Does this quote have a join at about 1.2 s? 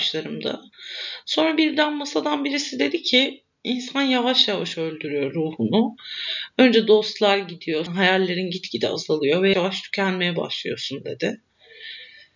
no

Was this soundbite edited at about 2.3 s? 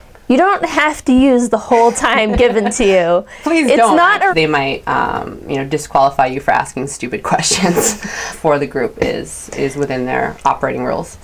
no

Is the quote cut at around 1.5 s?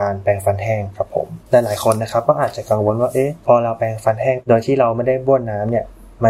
yes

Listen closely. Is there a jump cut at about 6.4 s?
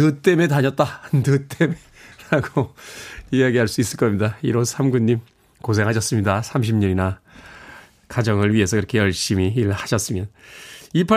no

